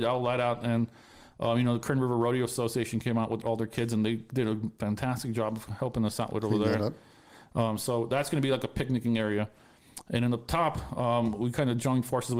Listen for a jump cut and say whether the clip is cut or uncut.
uncut